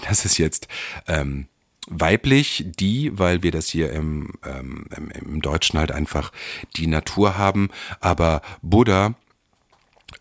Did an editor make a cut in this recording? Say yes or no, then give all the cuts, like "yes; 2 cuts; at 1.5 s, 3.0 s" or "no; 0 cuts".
no; 0 cuts